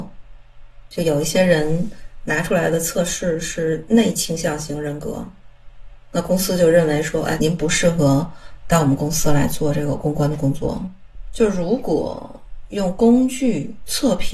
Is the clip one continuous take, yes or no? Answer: no